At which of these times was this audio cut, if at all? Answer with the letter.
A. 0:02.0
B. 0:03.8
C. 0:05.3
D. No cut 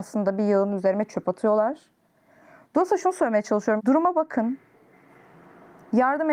B